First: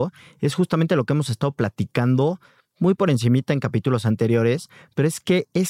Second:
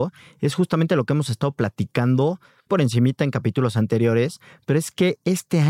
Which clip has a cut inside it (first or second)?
second